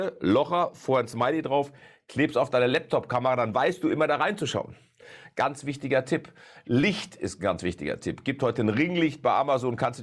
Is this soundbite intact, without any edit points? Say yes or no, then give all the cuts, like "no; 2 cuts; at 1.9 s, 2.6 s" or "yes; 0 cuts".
yes; 0 cuts